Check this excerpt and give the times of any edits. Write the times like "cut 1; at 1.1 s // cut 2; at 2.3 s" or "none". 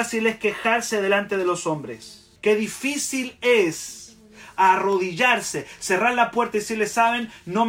cut 1; at 2.4 s